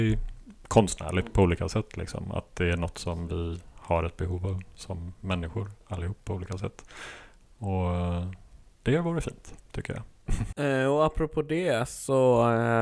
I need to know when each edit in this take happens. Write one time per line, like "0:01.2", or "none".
0:10.5